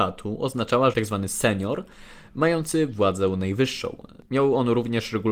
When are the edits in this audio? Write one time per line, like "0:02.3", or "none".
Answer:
0:00.9
0:04.3